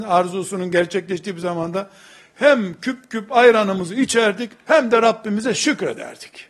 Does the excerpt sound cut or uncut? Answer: uncut